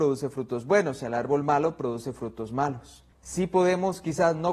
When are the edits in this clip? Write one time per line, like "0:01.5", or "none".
0:03.1